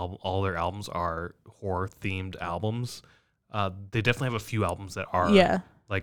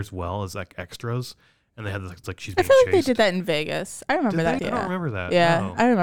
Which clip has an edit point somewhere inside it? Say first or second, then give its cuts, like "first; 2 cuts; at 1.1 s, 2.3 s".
second; 2 cuts; at 2.2 s, 4.6 s